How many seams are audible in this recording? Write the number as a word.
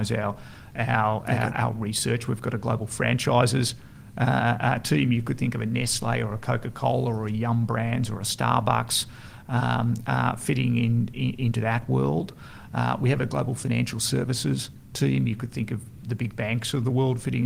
zero